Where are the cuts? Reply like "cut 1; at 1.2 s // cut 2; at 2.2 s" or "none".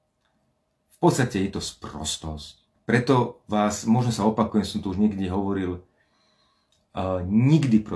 cut 1; at 2.7 s